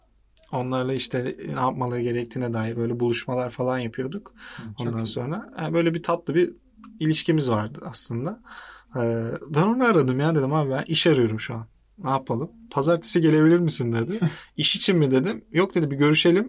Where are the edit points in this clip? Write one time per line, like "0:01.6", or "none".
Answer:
none